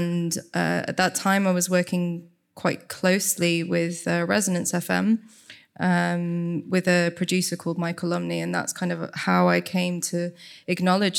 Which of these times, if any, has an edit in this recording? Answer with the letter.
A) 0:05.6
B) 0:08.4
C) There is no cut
C